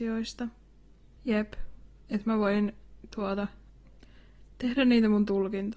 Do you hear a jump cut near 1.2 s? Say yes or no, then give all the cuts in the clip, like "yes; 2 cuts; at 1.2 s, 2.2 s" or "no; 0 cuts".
yes; 1 cut; at 1.2 s